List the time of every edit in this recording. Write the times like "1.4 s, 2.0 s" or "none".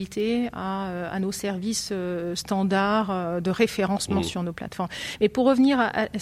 none